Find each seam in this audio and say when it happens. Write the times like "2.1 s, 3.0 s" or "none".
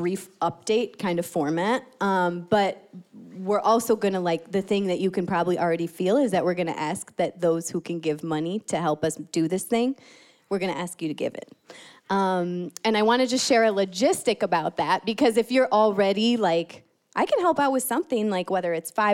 none